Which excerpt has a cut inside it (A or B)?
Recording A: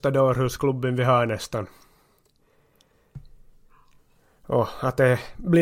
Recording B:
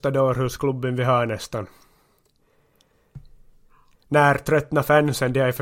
B